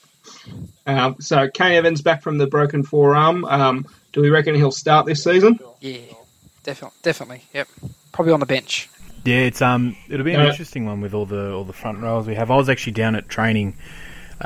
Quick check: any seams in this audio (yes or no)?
no